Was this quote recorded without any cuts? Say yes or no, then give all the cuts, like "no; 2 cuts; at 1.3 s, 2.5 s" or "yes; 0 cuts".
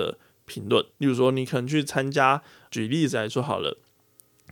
no; 2 cuts; at 0.9 s, 2.7 s